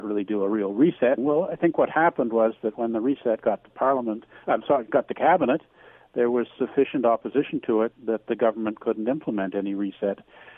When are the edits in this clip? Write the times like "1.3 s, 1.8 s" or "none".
1.2 s, 7.9 s